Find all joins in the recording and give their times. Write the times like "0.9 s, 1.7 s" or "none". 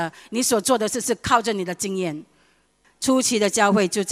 2.8 s